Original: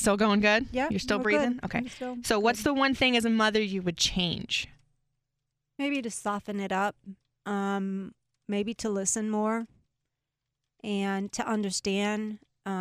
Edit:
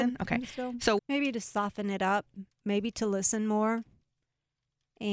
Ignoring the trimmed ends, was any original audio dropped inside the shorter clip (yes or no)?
yes